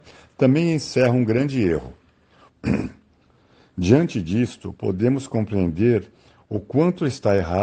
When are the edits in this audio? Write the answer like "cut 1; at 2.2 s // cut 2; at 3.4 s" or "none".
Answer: cut 1; at 2.5 s